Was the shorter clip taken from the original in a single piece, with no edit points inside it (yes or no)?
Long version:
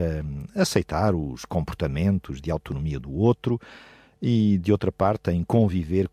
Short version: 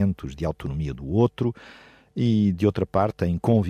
yes